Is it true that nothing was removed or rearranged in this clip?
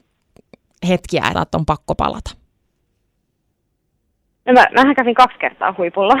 no; 1 cut; at 1.3 s

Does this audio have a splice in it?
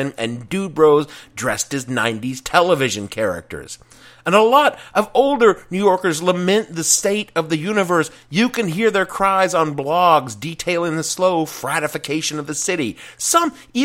no; 0 cuts

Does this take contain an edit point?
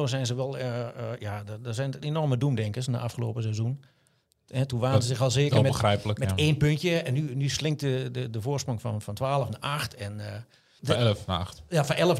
yes; 1 cut; at 10.8 s

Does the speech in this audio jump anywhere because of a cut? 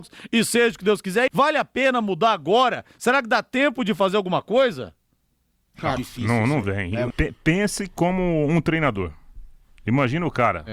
yes; 3 cuts; at 1.3 s, 6.0 s, 7.1 s

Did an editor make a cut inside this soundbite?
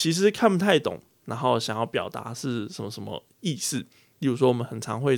yes; 1 cut; at 1.2 s

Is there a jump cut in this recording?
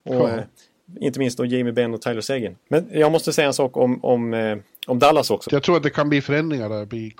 yes; 2 cuts; at 2.6 s, 5.5 s

